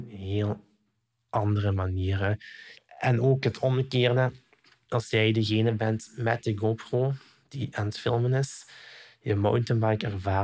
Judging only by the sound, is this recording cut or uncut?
cut